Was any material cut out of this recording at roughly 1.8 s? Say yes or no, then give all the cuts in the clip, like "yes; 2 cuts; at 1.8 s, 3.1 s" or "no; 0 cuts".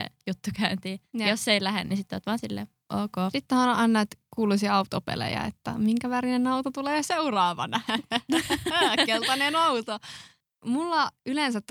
no; 0 cuts